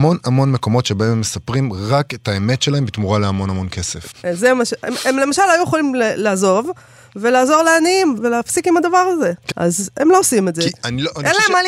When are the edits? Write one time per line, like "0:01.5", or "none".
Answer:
0:04.1
0:08.2
0:09.5